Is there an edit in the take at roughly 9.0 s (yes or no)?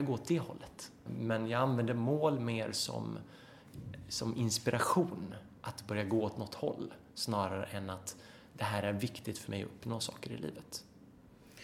no